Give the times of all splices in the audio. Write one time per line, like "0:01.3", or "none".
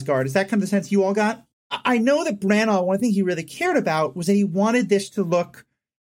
0:01.5